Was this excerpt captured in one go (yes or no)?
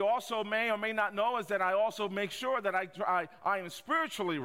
yes